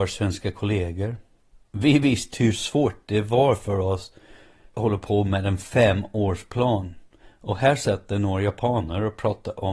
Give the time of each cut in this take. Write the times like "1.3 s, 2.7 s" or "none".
2.3 s